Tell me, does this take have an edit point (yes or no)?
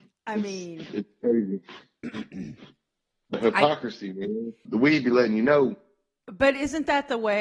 yes